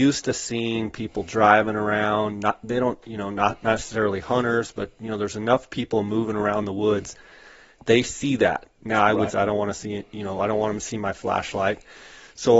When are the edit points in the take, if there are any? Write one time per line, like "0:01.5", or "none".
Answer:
0:09.3